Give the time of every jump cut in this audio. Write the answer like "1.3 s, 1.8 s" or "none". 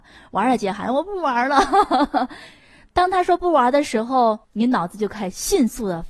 4.4 s